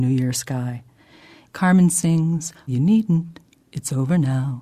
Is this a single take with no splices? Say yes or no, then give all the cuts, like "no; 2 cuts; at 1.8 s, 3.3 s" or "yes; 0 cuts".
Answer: no; 2 cuts; at 1.4 s, 2.7 s